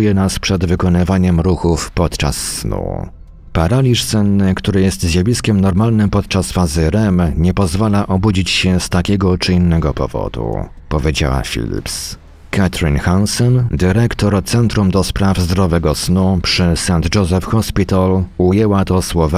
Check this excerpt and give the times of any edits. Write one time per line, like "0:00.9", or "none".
none